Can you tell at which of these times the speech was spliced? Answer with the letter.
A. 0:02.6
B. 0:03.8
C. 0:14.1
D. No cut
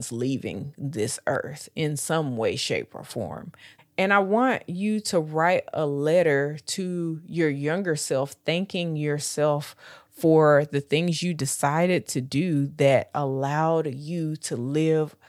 B